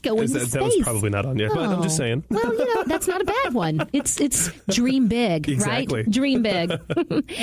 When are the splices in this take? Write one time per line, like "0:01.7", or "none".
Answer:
0:01.5